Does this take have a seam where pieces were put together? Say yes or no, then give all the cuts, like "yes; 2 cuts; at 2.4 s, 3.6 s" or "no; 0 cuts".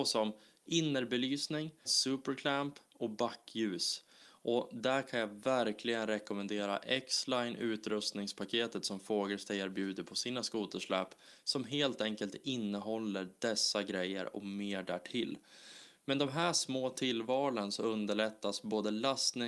yes; 1 cut; at 1.9 s